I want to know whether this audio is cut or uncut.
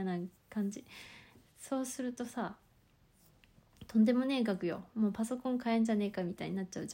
uncut